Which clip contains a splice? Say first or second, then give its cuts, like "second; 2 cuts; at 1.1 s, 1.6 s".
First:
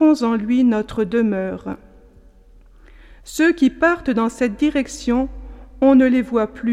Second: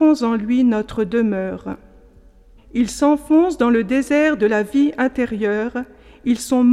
second; 1 cut; at 2.6 s